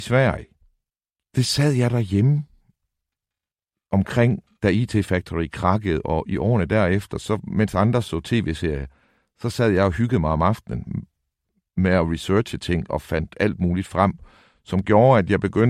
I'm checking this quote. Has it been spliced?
no; 0 cuts

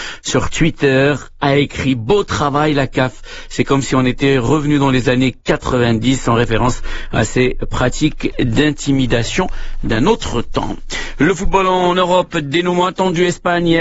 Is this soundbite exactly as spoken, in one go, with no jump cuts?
yes; 0 cuts

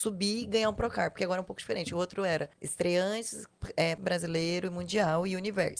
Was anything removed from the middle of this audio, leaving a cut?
yes; 2 cuts; at 2.5 s, 4.0 s

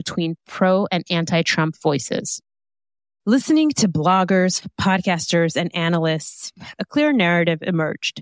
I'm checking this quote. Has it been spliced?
no; 0 cuts

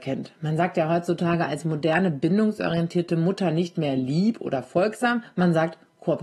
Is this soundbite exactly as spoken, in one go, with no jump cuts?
yes; 0 cuts

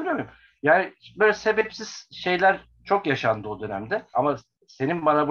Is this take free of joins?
no; 1 cut; at 4.1 s

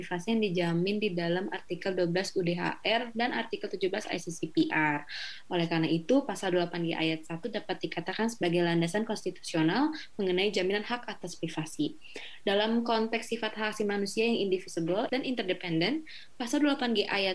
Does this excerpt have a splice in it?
yes; 1 cut; at 15.1 s

